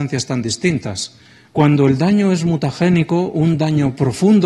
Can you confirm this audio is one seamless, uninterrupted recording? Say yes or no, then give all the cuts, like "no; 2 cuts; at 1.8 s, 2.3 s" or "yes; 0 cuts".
no; 1 cut; at 1.5 s